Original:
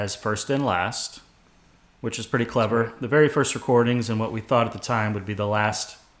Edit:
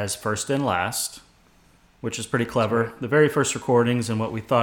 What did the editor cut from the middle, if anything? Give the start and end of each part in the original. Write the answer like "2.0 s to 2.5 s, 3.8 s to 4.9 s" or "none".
none